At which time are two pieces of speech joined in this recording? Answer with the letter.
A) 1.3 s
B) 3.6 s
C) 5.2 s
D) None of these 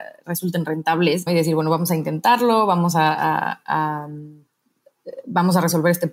A